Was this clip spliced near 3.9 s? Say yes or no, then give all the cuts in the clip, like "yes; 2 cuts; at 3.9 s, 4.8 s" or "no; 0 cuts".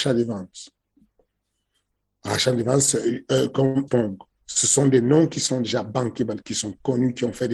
yes; 1 cut; at 3.9 s